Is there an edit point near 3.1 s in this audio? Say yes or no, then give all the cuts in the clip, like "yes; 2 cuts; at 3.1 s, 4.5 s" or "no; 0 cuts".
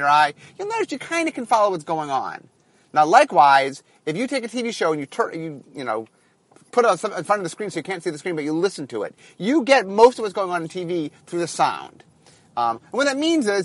no; 0 cuts